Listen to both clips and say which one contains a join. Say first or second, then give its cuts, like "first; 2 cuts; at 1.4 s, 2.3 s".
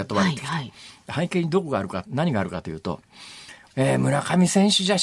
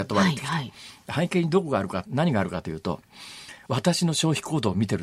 first; 1 cut; at 3.7 s